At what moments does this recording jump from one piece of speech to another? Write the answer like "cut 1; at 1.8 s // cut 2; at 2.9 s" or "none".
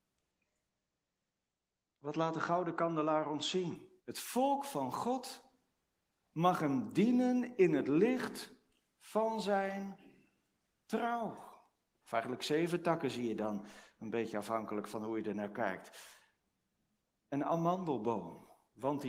cut 1; at 4.0 s // cut 2; at 12.0 s

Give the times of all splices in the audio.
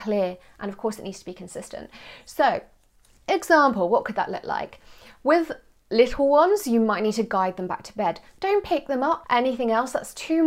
cut 1; at 9.2 s

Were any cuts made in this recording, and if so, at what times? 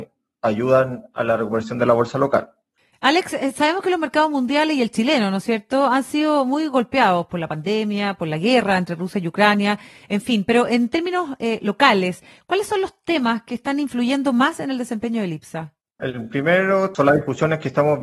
cut 1; at 16.0 s

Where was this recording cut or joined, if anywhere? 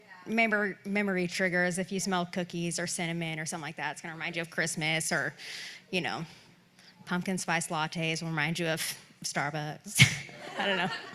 none

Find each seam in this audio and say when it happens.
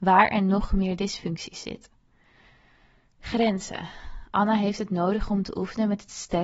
none

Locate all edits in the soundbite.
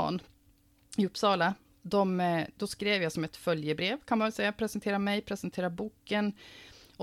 none

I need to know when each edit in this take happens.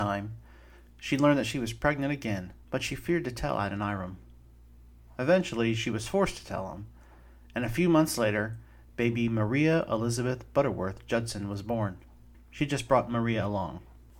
cut 1; at 2.6 s // cut 2; at 12.3 s

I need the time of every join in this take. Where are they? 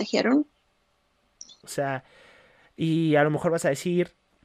cut 1; at 1.6 s

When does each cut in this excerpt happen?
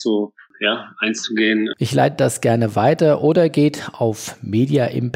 cut 1; at 1.7 s

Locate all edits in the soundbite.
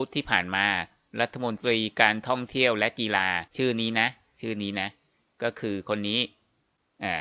cut 1; at 3.5 s

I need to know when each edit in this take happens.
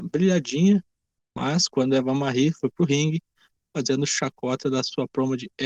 cut 1; at 3.6 s

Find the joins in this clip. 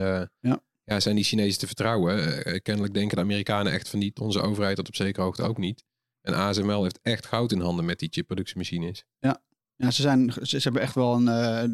none

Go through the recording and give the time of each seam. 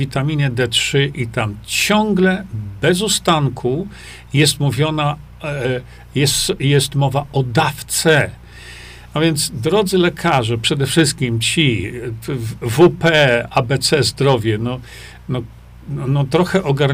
none

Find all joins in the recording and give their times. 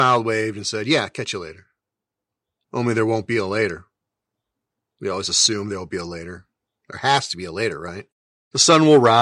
none

